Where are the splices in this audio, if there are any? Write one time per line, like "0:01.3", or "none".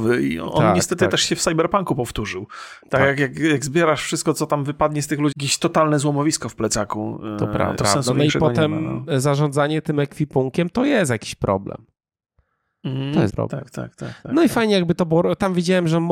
0:05.3
0:07.8
0:13.3